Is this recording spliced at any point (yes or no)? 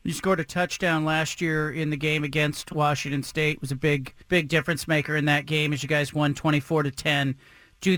yes